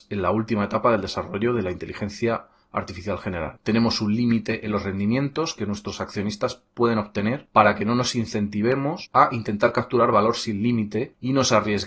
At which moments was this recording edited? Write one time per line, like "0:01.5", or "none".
none